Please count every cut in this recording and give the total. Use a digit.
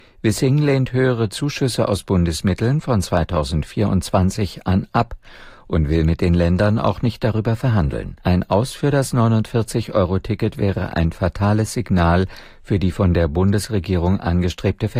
1